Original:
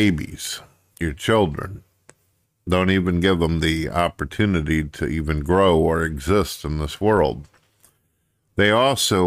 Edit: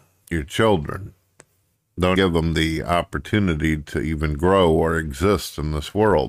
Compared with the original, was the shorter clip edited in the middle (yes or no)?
yes